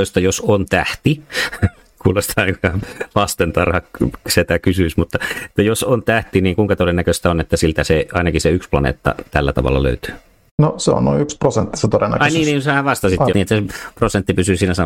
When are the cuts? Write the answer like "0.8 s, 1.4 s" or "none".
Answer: 13.3 s